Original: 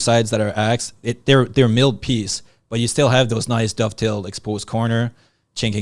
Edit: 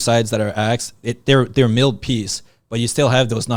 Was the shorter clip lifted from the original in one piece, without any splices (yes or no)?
yes